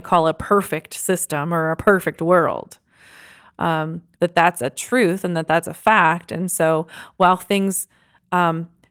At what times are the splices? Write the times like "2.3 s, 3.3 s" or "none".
4.2 s